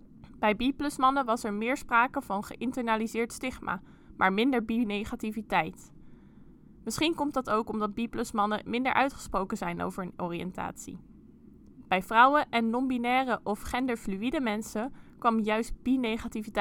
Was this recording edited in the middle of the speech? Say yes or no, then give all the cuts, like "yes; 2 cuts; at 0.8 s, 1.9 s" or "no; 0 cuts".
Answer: no; 0 cuts